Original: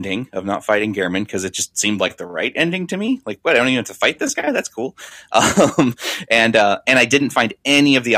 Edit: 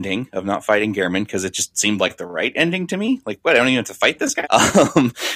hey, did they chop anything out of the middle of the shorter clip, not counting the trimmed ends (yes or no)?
yes